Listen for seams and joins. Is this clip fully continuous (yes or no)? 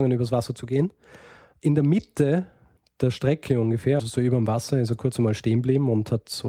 no